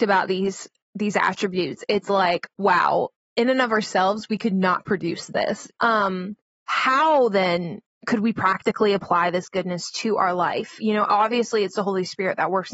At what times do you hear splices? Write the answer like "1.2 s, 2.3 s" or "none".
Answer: 5.8 s